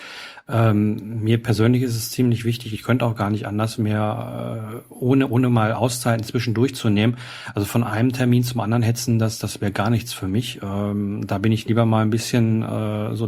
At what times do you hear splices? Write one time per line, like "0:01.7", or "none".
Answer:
none